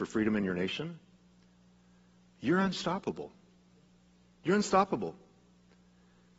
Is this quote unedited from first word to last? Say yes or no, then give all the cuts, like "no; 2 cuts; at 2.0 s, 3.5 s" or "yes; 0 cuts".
yes; 0 cuts